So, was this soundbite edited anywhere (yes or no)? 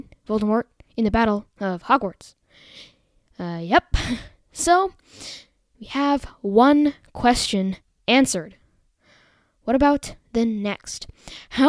no